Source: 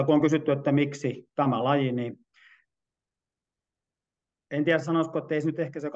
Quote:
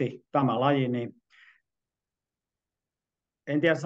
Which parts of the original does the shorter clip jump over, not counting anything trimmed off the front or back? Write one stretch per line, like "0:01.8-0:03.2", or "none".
none